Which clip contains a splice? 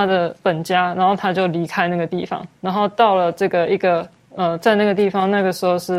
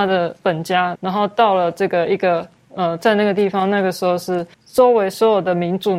second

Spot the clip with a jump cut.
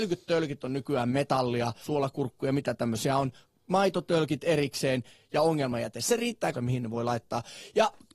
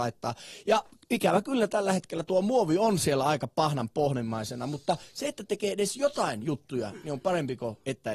first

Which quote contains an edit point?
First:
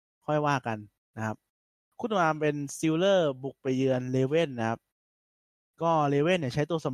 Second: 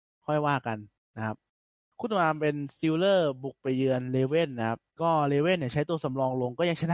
second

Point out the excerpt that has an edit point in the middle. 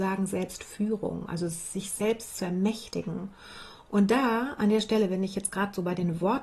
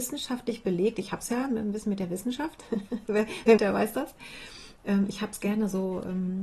second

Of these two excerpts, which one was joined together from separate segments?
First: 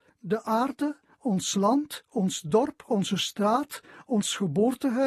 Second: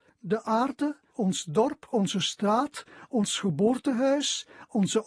second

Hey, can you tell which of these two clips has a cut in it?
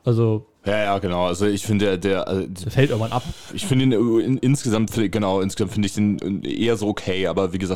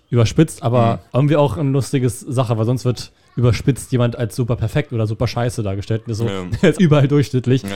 second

